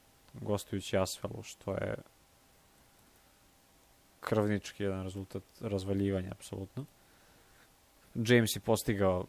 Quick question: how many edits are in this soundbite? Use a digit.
1